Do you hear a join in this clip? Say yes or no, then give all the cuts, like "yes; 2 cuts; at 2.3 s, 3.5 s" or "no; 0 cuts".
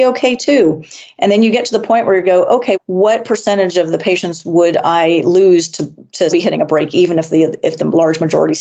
yes; 2 cuts; at 2.7 s, 6.3 s